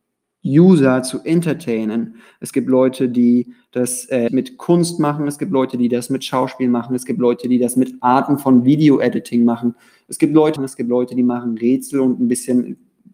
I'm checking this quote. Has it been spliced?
yes; 2 cuts; at 4.3 s, 10.6 s

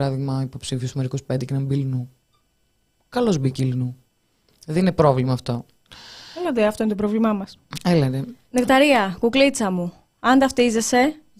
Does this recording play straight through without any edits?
yes; 0 cuts

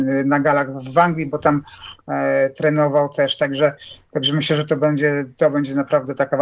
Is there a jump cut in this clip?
no; 0 cuts

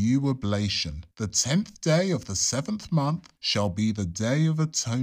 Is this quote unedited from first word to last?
no; 2 cuts; at 1.1 s, 3.4 s

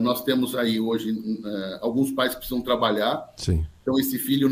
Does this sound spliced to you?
no; 0 cuts

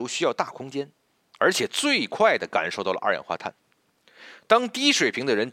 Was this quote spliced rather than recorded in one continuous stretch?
yes; 1 cut; at 1.3 s

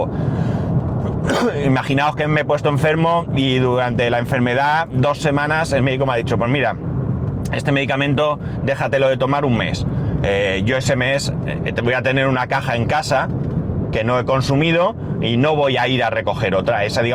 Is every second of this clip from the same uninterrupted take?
yes; 0 cuts

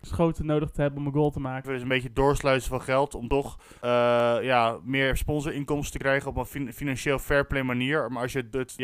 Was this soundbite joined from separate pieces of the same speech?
yes; 1 cut; at 1.6 s

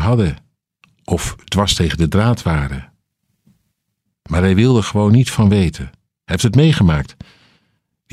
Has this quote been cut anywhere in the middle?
no; 0 cuts

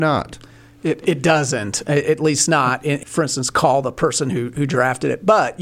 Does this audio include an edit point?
yes; 2 cuts; at 1.0 s, 3.0 s

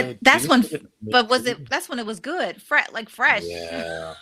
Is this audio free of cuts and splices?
yes; 0 cuts

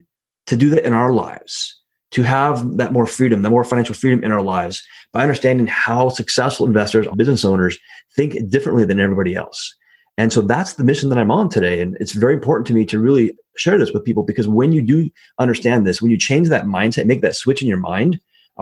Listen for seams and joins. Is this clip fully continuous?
no; 1 cut; at 7.1 s

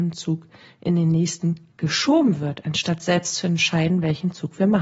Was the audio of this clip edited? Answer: no; 0 cuts

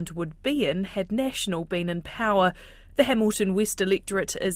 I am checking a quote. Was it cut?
no; 0 cuts

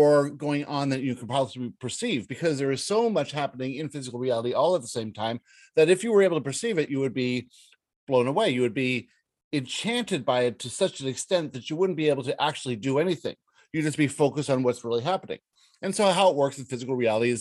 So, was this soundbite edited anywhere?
no; 0 cuts

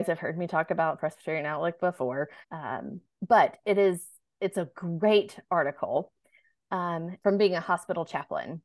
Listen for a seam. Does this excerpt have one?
yes; 2 cuts; at 2.4 s, 7.2 s

